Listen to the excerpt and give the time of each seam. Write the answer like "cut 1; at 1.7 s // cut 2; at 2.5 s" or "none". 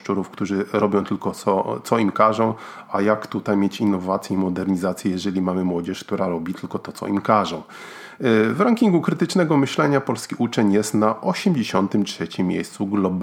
none

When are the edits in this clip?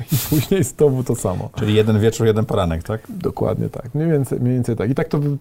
none

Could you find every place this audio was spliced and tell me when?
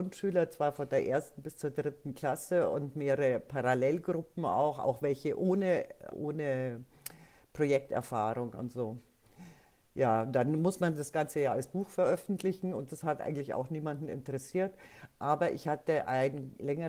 cut 1; at 6.1 s

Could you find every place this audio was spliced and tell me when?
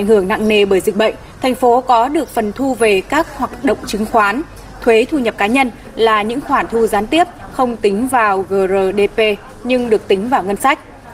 cut 1; at 1.4 s

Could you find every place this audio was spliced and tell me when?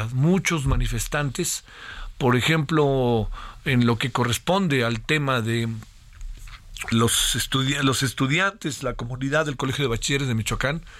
cut 1; at 6.9 s

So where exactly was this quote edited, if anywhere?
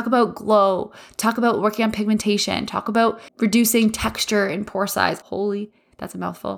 cut 1; at 3.3 s // cut 2; at 5.2 s

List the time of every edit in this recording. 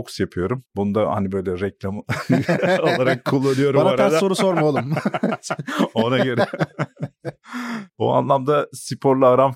none

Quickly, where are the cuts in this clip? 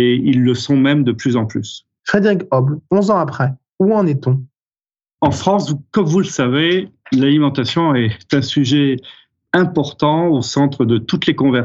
cut 1; at 2.0 s

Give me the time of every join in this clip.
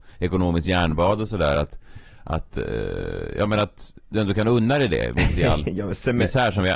none

